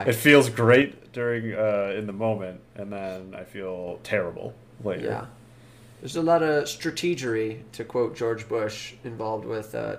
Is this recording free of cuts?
yes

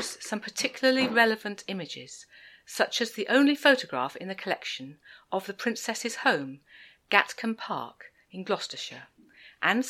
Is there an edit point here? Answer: no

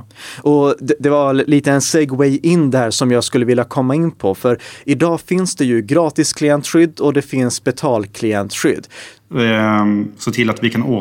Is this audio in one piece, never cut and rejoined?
no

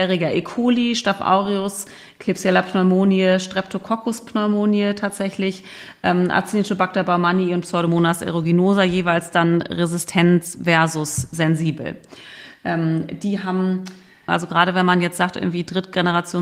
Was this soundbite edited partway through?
yes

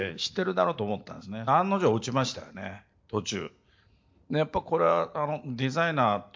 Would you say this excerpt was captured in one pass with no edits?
no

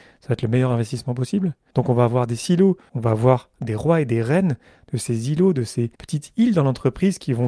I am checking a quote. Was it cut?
yes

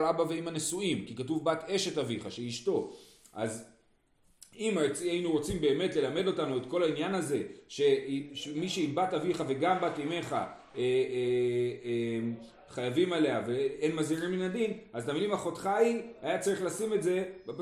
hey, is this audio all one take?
yes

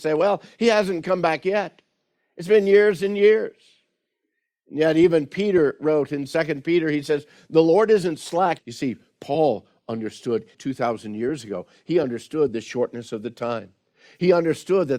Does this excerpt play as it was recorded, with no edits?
no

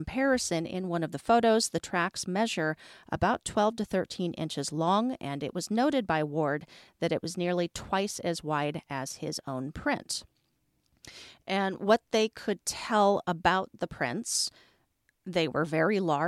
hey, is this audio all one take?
yes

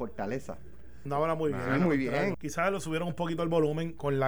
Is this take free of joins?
no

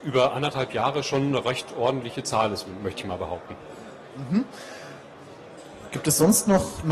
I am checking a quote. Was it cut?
no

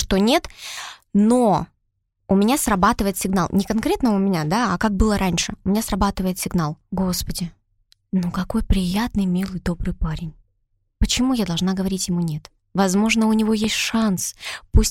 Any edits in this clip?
no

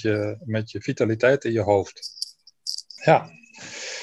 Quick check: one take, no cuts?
no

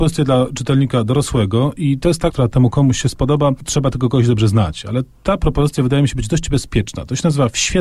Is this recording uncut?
no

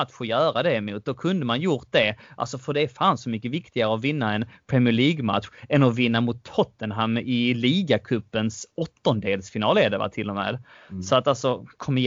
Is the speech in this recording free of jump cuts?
yes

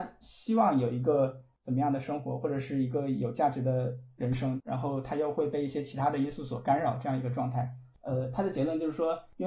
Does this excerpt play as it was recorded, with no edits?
no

